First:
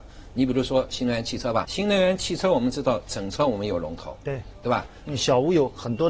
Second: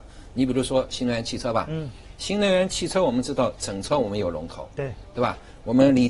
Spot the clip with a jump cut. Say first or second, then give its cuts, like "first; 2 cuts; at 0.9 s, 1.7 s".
first; 2 cuts; at 1.6 s, 5.0 s